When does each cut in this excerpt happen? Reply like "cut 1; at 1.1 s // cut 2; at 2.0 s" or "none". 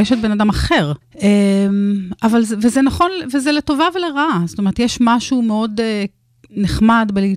cut 1; at 1.0 s